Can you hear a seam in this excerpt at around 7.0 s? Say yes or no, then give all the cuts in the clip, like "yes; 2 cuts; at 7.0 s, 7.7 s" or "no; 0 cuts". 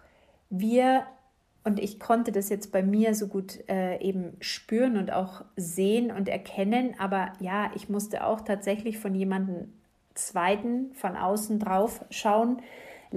no; 0 cuts